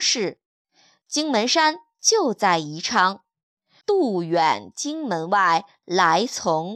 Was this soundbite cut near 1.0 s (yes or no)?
no